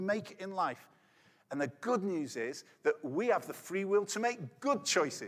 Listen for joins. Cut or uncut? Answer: uncut